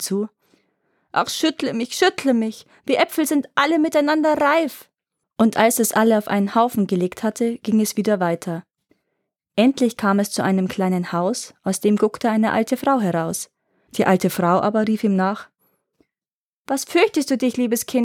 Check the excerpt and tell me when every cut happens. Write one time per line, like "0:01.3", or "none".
0:05.2
0:13.9